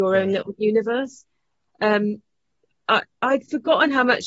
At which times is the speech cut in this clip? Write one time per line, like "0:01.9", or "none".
none